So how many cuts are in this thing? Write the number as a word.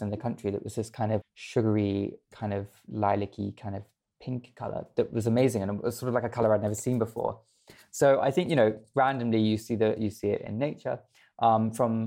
one